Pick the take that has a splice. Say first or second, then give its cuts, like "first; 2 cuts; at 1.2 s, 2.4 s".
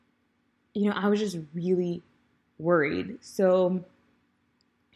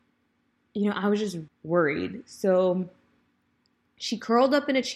second; 1 cut; at 1.5 s